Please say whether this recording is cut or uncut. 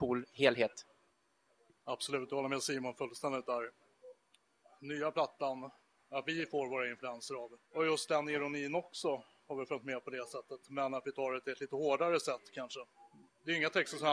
cut